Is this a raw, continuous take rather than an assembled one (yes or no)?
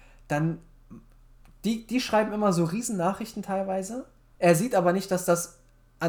yes